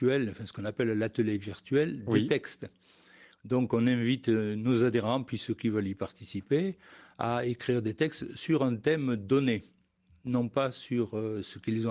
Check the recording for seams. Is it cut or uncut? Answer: uncut